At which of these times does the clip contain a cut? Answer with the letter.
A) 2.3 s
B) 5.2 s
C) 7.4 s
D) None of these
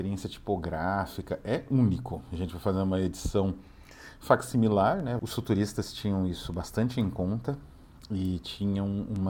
B